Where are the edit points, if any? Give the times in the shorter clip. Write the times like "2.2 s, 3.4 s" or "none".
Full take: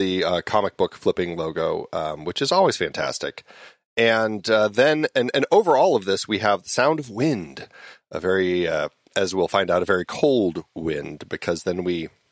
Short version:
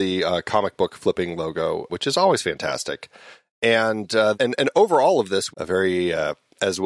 1.9 s, 4.3 s, 5.5 s